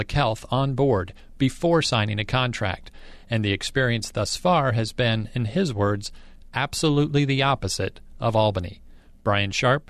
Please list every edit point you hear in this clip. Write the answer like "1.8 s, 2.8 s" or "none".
none